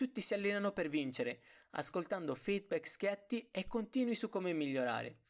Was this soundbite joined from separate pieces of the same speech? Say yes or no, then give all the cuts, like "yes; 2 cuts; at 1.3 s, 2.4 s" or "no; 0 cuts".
no; 0 cuts